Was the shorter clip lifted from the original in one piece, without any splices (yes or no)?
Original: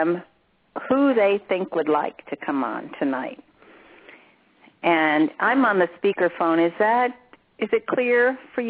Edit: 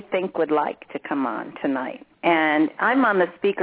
no